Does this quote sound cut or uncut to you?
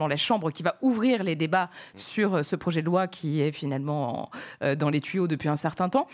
uncut